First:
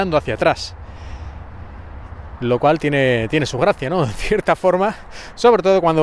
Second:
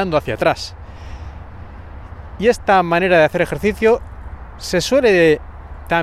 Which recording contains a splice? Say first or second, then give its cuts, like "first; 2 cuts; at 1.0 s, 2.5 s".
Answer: first; 1 cut; at 2.4 s